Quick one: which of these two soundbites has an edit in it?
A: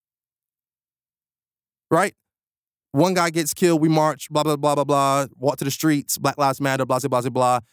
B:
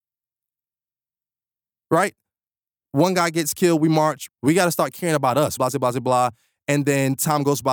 B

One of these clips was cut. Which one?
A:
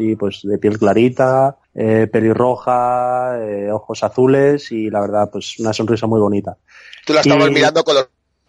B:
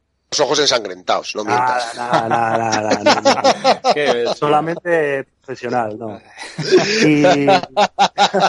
A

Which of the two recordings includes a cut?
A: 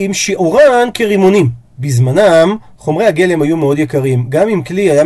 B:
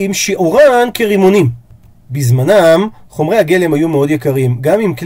A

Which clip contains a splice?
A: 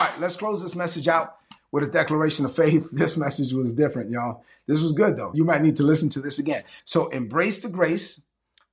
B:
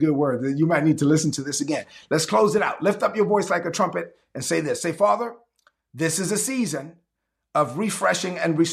A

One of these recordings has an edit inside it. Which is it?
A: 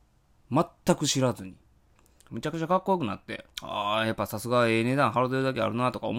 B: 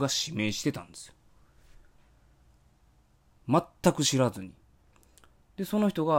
A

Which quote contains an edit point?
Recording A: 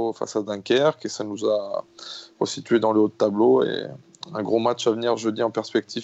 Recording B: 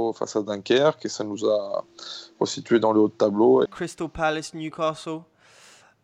B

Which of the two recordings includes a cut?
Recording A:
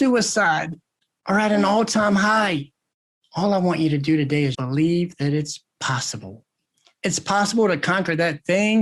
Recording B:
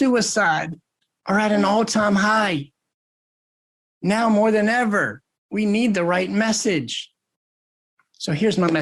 A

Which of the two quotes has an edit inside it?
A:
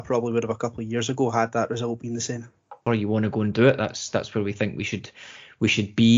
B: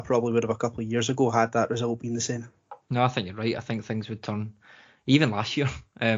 A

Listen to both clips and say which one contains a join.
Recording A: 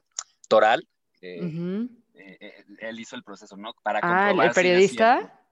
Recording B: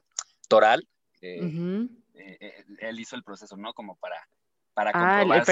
A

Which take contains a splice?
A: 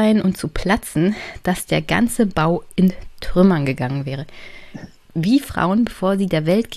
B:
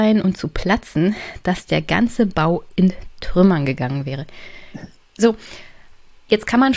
A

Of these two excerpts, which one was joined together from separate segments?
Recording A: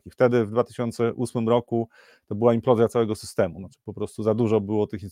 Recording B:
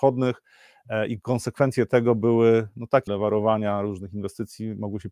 B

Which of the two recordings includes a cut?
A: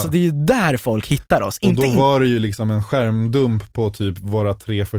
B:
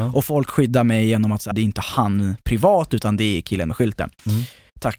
B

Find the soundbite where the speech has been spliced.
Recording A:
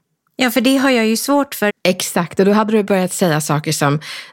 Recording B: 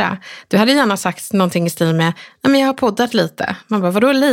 A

